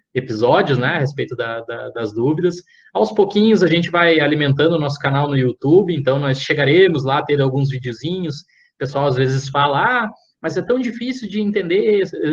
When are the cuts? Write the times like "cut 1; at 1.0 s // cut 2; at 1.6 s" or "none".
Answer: none